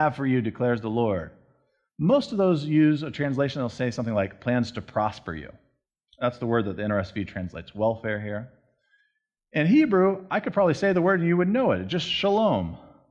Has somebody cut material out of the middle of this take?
no; 0 cuts

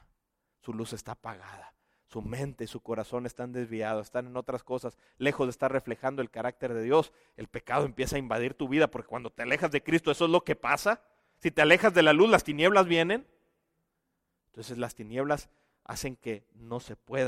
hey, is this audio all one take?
yes; 0 cuts

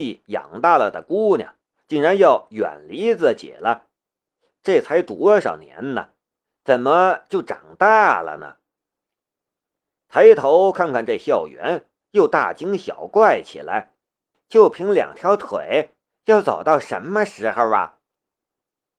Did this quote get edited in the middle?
yes; 1 cut; at 14.3 s

